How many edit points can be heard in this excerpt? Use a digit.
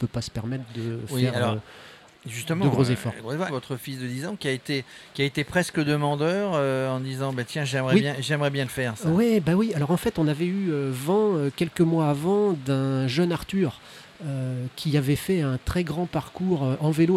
1